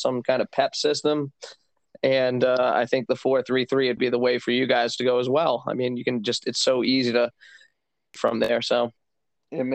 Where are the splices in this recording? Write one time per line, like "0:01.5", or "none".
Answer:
0:04.0